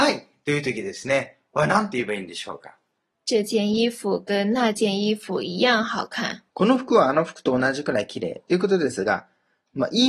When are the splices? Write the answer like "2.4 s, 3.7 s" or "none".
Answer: 3.1 s, 6.5 s

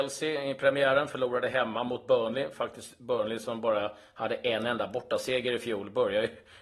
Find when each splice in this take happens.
none

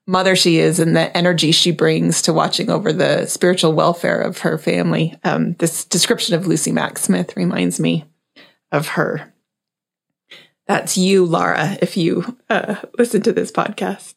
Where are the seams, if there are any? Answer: none

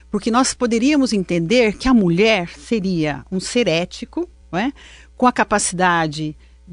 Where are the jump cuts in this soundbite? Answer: none

